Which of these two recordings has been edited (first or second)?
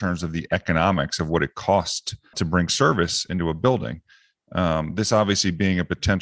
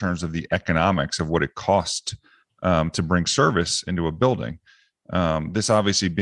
first